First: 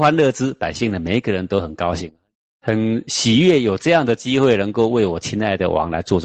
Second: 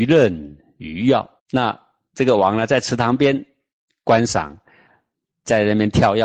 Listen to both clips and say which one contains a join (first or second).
second